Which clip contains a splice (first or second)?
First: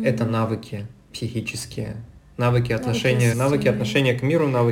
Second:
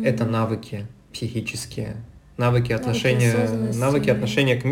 first